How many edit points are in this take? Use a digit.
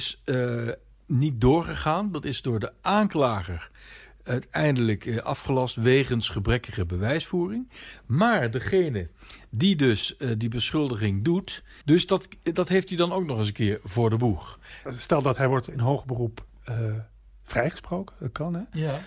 2